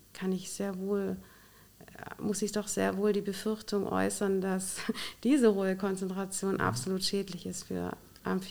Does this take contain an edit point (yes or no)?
no